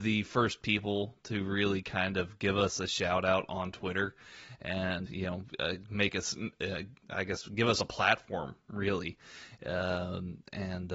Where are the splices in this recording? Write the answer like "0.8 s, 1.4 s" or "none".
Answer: 5.1 s